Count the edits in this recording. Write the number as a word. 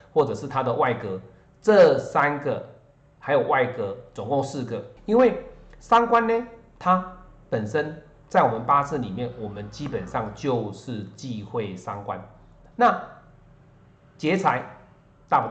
two